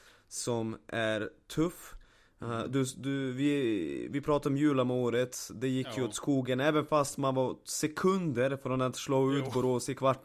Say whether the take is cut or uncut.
uncut